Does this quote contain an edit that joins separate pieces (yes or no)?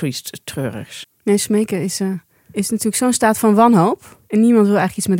yes